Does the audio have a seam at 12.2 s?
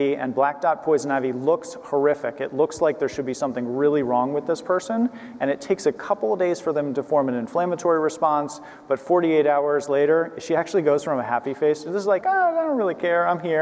yes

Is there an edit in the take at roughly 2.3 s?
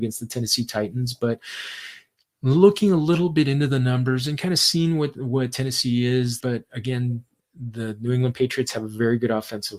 no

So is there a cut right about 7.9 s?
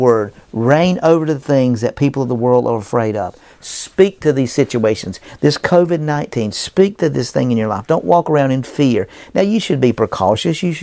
no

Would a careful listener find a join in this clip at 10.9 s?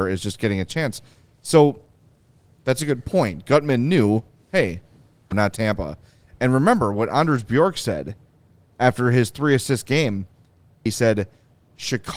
yes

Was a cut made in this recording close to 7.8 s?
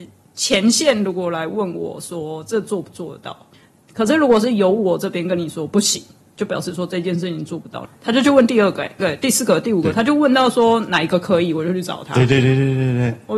yes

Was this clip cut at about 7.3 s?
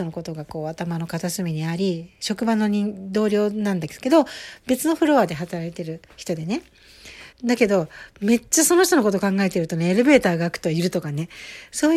yes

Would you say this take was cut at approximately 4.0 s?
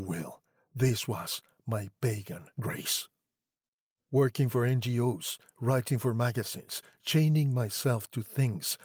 yes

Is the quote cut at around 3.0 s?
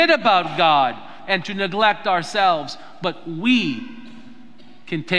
no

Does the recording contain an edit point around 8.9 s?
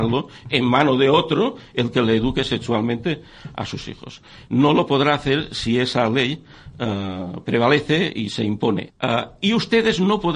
yes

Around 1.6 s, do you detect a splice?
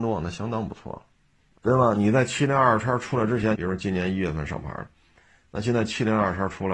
yes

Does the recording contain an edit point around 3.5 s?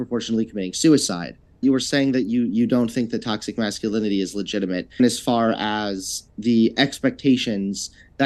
no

